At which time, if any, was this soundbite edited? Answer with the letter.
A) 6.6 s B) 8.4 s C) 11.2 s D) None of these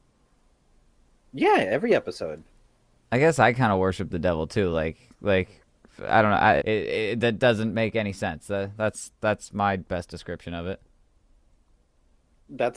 A